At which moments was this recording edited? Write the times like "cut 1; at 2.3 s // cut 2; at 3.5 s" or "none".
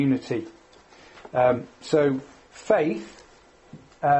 none